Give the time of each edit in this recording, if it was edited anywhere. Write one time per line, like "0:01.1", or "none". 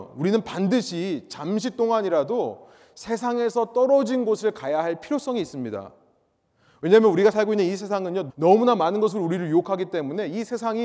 0:08.3